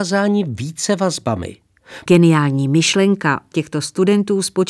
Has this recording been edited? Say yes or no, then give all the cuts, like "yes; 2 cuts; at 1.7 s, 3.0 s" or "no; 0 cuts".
yes; 2 cuts; at 2.1 s, 3.5 s